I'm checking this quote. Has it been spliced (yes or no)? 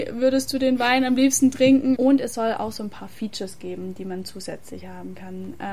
yes